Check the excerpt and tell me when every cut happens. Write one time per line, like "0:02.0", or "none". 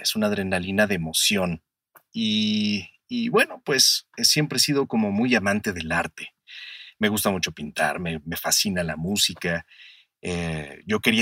none